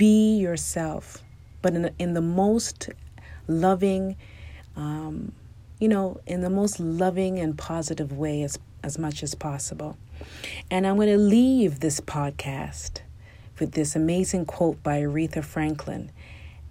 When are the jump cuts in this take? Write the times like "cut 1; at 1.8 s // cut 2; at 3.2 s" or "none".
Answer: none